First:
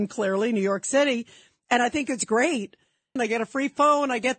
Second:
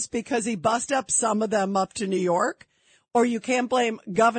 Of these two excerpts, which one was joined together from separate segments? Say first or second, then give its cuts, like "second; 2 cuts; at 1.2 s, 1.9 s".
first; 1 cut; at 3.2 s